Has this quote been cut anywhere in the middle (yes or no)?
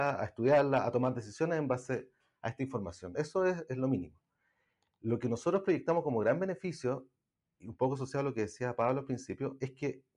no